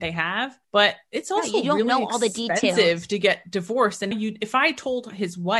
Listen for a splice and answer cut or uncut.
cut